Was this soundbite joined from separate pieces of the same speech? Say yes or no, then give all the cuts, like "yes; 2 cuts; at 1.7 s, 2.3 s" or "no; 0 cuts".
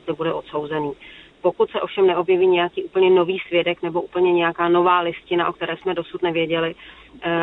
yes; 1 cut; at 1.3 s